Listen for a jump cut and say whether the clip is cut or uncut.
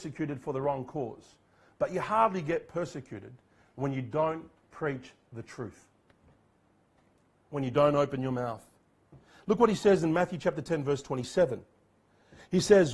uncut